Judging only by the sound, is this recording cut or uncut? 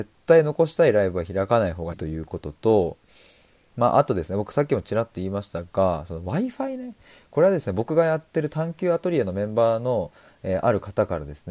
cut